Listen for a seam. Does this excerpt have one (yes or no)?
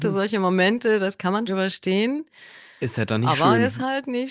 yes